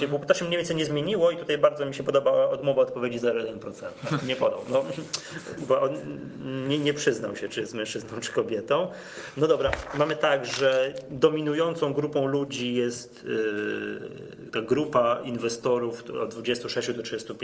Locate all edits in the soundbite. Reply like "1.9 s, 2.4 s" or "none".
4.2 s